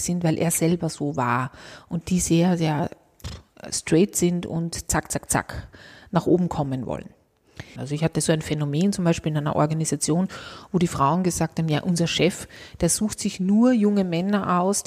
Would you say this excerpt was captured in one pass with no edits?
no; 1 cut; at 7.8 s

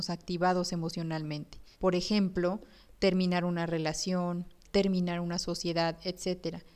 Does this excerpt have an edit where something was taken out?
yes; 2 cuts; at 1.7 s, 4.6 s

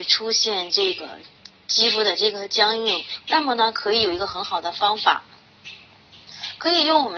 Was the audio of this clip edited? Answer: yes; 1 cut; at 3.2 s

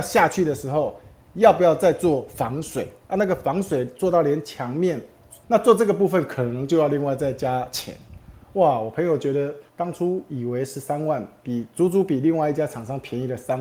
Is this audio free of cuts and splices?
no; 2 cuts; at 5.4 s, 9.7 s

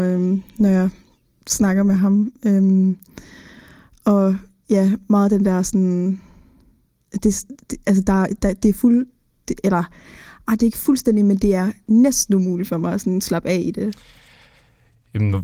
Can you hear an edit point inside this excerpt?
no; 0 cuts

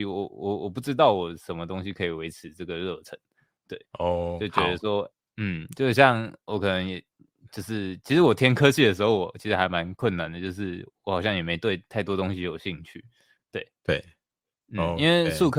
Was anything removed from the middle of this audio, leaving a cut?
yes; 1 cut; at 13.4 s

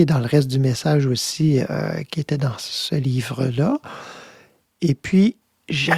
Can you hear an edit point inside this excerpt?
no; 0 cuts

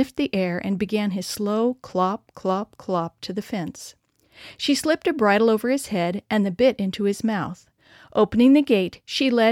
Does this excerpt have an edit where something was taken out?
no; 0 cuts

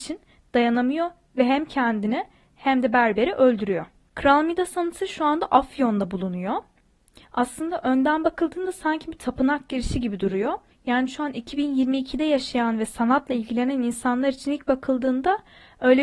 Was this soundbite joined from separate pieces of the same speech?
yes; 1 cut; at 4.1 s

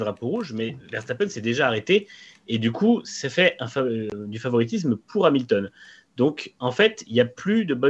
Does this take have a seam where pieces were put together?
no; 0 cuts

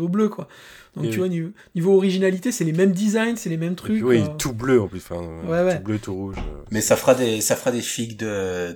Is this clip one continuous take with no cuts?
yes; 0 cuts

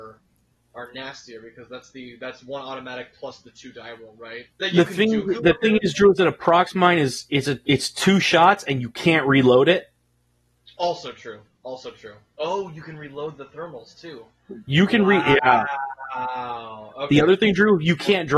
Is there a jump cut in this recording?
yes; 1 cut; at 4.5 s

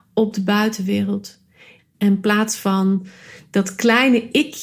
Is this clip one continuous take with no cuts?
no; 1 cut; at 1.8 s

